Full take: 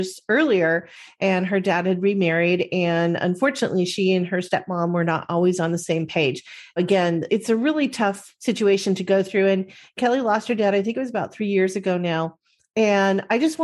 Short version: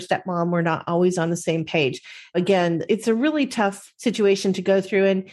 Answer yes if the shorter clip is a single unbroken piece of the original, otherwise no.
yes